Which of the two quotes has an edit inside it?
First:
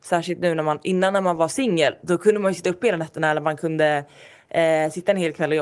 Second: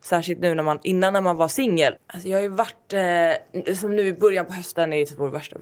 second; 1 cut; at 2.0 s

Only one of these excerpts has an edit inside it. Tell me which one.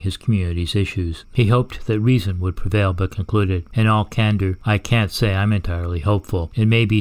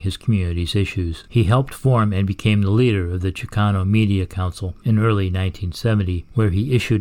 first; 1 cut; at 1.2 s

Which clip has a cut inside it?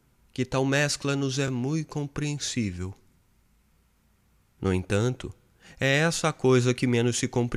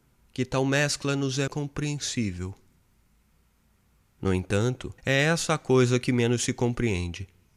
second; 2 cuts; at 1.5 s, 5.0 s

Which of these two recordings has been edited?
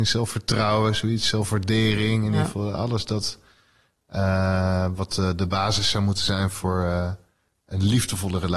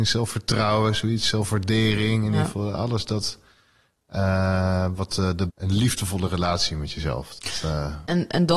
second; 1 cut; at 5.5 s

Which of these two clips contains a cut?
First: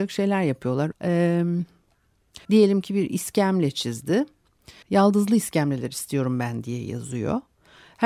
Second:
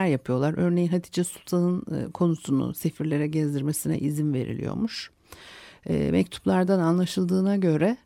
first; 3 cuts; at 0.9 s, 2.4 s, 4.8 s

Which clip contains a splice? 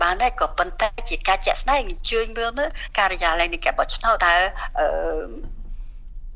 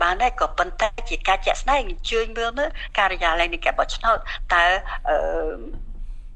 first; 1 cut; at 4.2 s

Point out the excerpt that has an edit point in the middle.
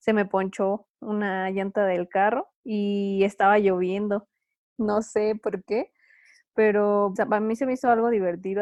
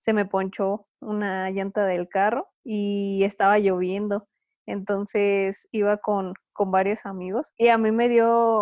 first; 2 cuts; at 4.6 s, 7.2 s

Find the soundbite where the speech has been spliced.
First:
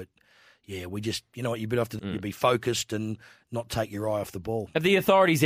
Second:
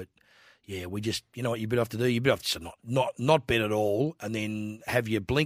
first; 1 cut; at 2.0 s

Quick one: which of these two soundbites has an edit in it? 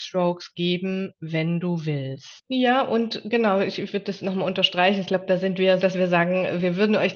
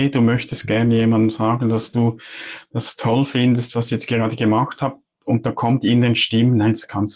first; 2 cuts; at 2.4 s, 5.8 s

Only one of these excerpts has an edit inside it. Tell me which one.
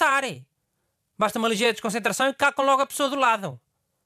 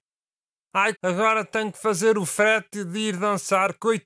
second; 1 cut; at 0.9 s

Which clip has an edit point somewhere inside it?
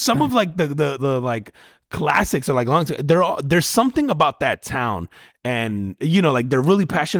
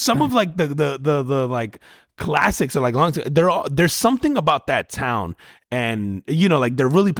first; 1 cut; at 1.0 s

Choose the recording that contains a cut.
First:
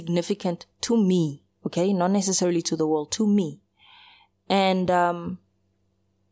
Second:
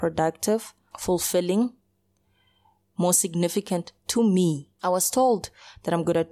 second; 2 cuts; at 0.9 s, 4.8 s

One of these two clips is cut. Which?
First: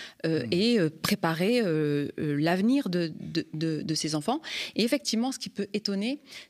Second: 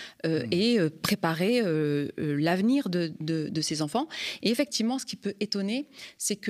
second; 1 cut; at 3.2 s

